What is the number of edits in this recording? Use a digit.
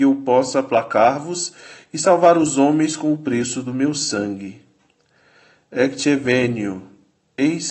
0